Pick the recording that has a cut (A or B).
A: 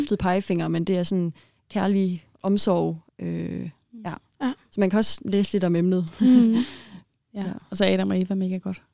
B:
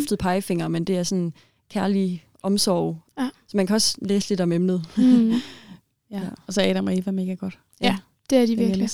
B